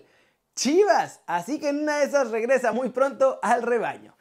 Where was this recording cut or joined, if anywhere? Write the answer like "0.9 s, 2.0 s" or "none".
none